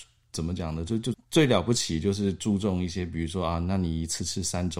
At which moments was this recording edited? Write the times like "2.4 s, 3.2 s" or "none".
1.1 s